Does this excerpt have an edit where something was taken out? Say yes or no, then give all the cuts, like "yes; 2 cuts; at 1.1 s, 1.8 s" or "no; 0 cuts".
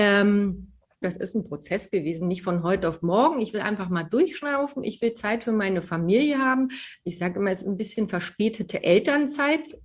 yes; 1 cut; at 1.0 s